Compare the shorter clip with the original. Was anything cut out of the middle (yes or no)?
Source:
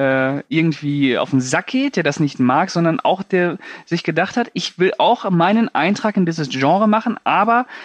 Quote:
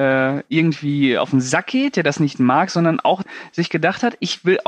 yes